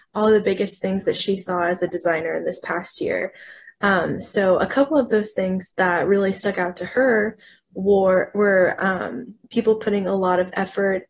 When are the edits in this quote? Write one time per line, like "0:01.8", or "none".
none